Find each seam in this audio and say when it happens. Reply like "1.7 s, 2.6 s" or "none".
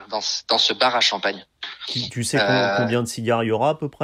none